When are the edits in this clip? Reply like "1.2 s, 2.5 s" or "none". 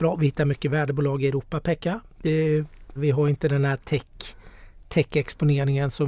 3.0 s